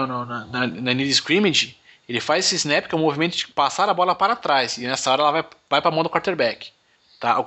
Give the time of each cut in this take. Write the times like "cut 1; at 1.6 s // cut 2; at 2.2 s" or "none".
none